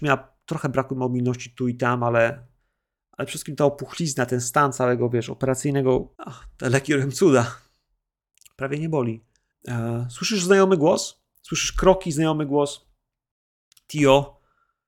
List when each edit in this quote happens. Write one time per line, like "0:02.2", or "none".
0:06.1
0:09.5